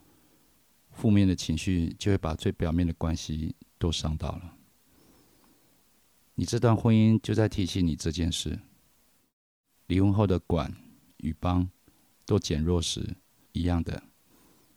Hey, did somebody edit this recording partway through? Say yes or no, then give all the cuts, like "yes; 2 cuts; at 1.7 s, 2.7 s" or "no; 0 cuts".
yes; 1 cut; at 13.4 s